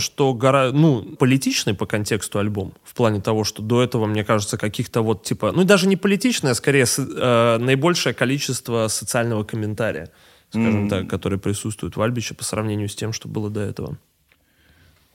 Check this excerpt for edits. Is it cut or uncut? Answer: cut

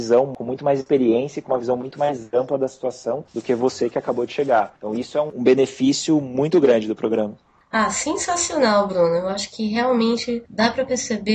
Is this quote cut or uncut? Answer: uncut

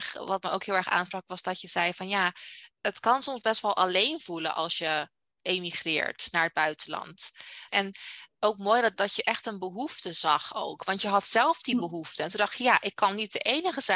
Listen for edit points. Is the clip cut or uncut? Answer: cut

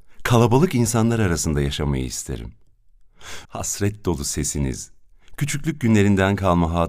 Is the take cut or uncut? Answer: cut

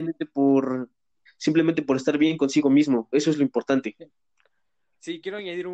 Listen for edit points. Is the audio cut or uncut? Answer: cut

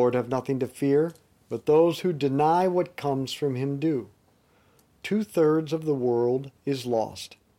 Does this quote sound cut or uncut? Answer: cut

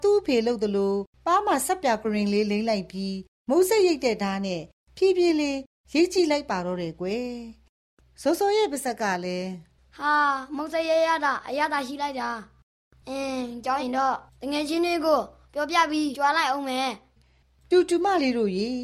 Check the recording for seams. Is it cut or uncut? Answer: cut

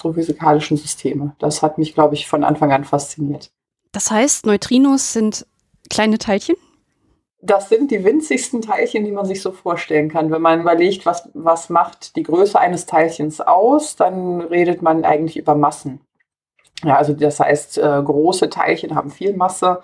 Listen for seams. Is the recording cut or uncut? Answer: uncut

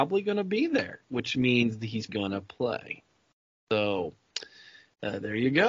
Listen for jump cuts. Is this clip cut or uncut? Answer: cut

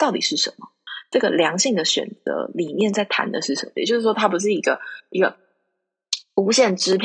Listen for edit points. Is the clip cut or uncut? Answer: cut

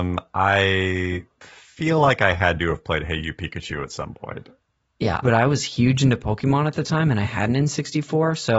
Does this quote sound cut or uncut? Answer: cut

